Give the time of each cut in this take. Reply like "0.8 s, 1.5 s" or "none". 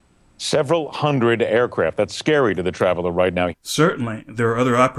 3.5 s